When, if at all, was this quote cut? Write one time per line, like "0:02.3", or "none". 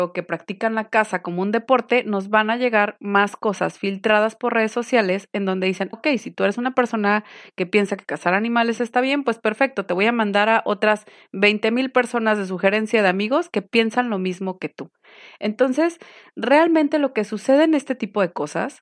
0:05.9

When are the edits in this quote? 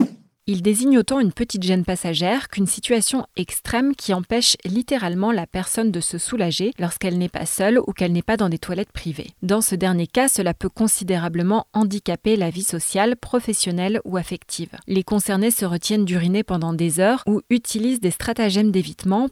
none

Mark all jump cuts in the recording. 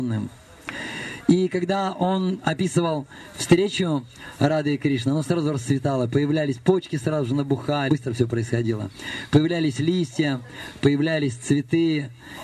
0:07.9

